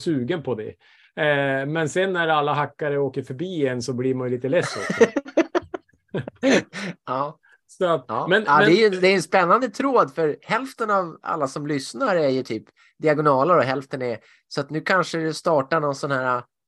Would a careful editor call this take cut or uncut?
uncut